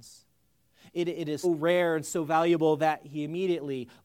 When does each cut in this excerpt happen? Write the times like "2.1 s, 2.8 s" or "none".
1.4 s

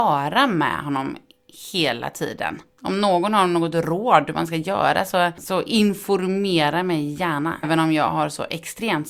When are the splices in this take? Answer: 2.7 s, 7.6 s

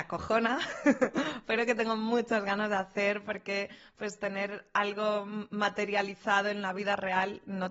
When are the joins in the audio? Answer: none

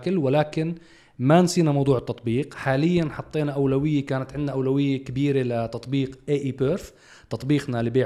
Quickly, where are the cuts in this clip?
none

